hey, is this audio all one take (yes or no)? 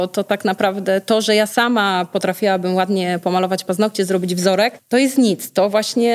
yes